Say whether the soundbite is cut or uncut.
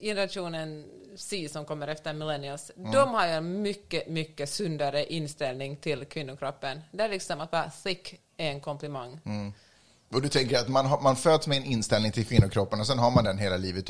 uncut